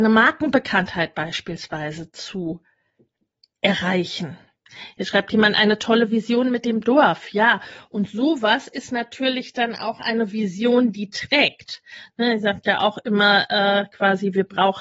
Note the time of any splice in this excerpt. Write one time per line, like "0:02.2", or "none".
none